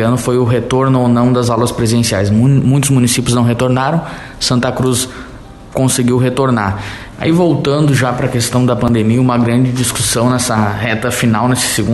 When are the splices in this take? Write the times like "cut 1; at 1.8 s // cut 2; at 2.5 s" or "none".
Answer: cut 1; at 7.1 s